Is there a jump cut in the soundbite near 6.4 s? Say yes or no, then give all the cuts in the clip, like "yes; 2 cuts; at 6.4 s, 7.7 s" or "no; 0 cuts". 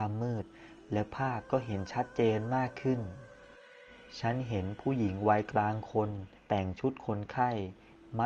yes; 1 cut; at 6.4 s